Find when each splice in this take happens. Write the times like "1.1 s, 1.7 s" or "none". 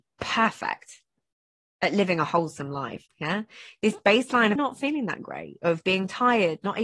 3.1 s, 4.6 s